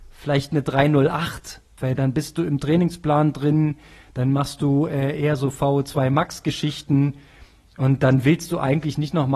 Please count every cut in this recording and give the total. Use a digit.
1